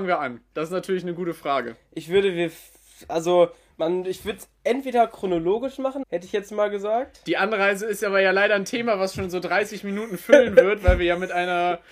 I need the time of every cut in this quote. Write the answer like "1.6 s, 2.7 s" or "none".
6.0 s